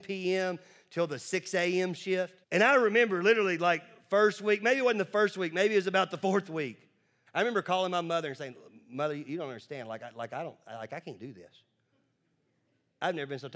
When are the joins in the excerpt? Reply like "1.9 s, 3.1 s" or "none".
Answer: 2.4 s, 7.3 s

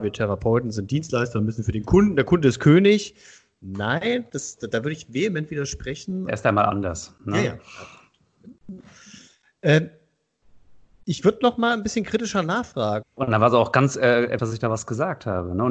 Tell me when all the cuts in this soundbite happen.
6.3 s, 13.0 s, 14.4 s

